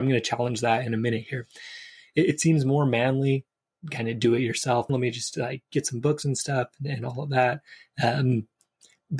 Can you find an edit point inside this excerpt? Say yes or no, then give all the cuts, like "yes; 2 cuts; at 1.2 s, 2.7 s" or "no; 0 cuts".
yes; 1 cut; at 4.9 s